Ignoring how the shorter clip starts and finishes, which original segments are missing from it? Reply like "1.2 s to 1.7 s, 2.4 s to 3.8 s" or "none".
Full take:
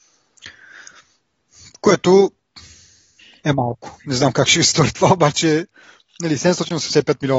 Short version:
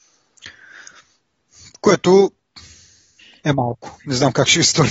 none